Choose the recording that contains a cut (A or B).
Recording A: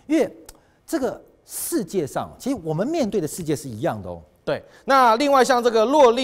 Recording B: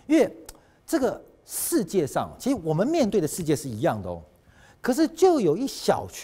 A